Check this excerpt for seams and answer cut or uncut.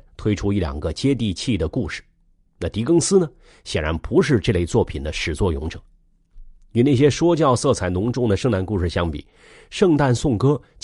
uncut